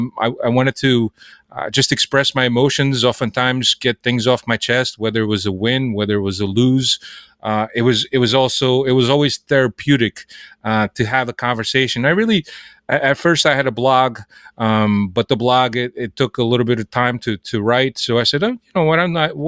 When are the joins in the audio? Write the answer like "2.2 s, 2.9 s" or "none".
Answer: none